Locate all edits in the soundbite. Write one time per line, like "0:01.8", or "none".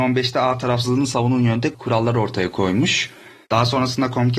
0:03.4